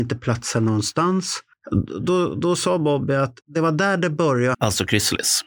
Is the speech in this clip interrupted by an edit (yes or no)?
yes